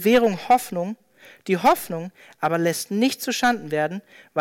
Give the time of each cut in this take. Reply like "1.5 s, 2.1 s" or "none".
none